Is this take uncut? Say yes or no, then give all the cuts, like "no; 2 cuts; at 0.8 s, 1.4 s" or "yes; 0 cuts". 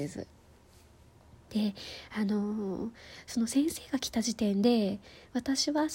yes; 0 cuts